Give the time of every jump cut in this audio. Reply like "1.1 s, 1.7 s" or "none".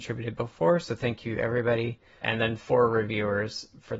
2.2 s